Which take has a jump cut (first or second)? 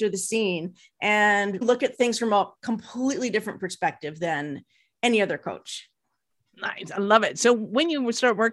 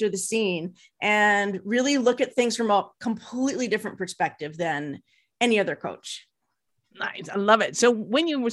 first